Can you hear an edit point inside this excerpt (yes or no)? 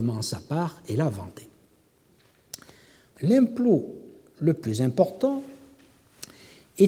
yes